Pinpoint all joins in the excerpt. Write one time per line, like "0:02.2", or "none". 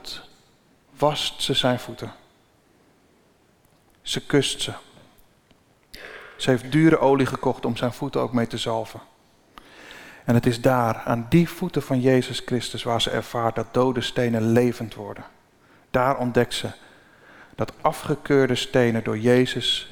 none